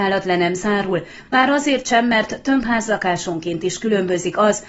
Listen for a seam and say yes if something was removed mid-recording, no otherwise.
no